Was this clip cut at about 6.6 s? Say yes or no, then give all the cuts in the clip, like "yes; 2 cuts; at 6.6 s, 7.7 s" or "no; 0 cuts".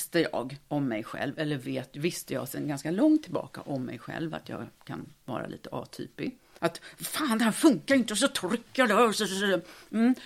yes; 1 cut; at 6.6 s